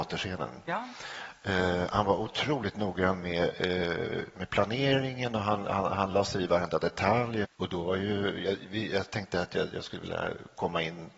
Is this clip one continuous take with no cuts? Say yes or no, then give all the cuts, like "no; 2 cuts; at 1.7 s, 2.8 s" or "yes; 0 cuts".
no; 1 cut; at 7.4 s